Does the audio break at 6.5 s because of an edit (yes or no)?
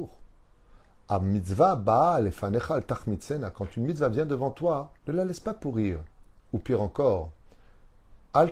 no